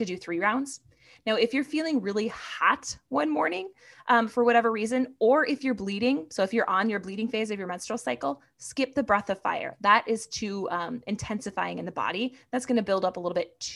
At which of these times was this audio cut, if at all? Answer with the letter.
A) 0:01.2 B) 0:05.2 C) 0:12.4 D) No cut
D